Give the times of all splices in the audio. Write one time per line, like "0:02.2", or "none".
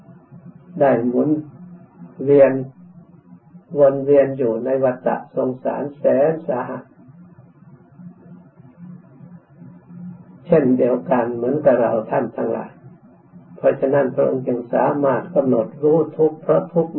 0:02.1
0:03.7